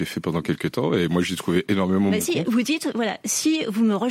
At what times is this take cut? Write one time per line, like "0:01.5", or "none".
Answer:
0:02.4